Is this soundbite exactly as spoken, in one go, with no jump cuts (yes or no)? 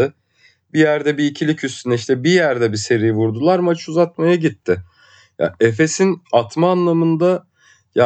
yes